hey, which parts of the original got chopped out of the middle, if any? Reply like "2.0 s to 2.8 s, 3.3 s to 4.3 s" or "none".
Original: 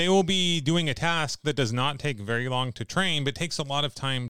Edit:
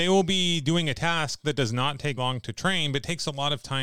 2.2 s to 2.5 s